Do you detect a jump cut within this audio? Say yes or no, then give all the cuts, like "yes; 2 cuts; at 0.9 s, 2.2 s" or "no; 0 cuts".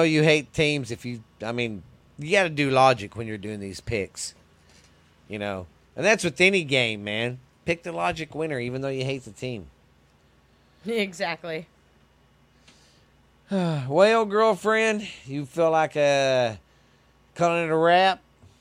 no; 0 cuts